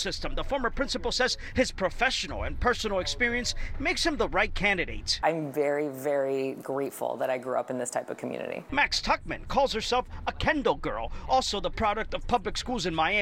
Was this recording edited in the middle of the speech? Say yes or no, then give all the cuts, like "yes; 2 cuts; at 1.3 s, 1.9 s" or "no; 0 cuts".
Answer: no; 0 cuts